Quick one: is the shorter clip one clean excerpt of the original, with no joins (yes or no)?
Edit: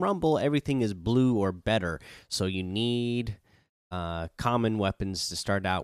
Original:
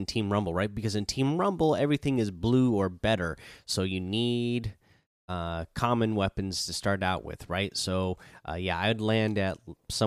yes